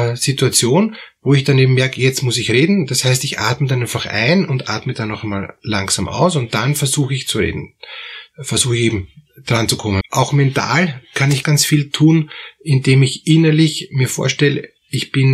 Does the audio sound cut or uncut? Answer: cut